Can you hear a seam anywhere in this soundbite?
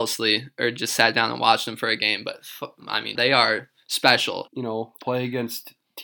yes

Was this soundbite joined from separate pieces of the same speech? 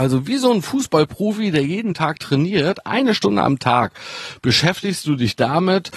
no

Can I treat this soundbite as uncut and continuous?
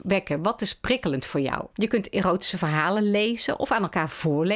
no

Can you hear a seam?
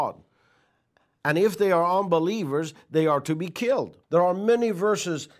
yes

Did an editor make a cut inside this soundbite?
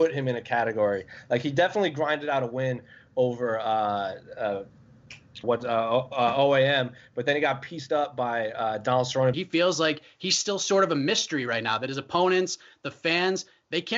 yes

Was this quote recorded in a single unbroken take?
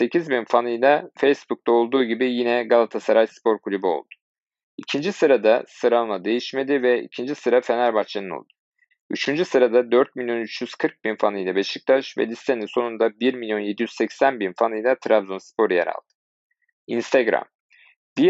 no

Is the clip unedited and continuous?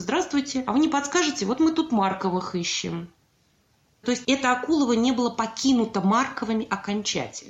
no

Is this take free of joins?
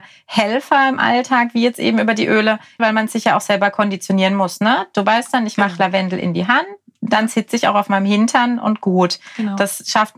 no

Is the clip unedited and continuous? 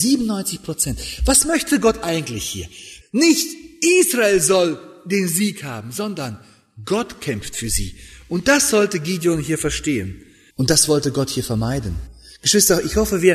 no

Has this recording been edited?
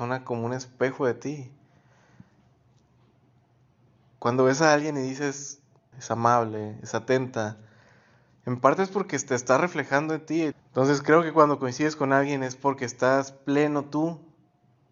yes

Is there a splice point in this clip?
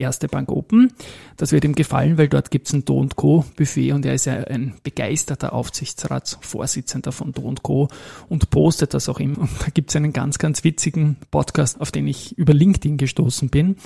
yes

